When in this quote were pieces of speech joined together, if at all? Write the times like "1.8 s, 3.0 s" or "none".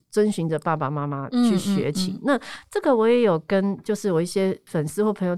none